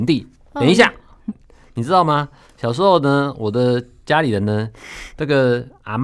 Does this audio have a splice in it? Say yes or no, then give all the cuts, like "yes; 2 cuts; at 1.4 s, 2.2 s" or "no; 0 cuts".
yes; 1 cut; at 1.3 s